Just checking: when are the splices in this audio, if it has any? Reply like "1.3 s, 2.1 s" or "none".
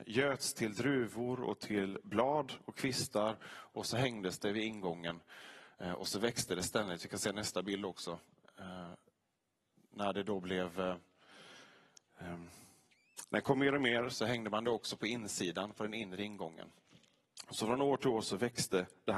14.1 s